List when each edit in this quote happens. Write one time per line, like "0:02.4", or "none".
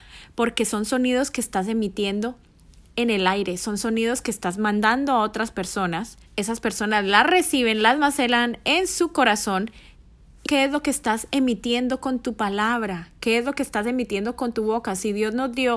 0:06.3
0:10.5